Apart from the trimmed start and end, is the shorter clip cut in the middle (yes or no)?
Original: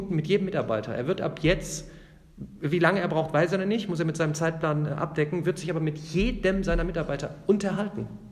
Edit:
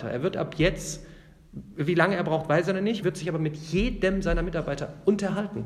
yes